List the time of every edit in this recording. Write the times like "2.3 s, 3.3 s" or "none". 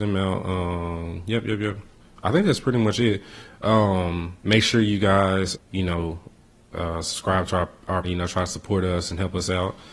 4.4 s, 5.5 s, 8.0 s